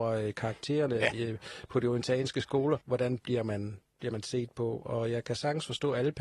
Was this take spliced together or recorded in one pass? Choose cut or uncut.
cut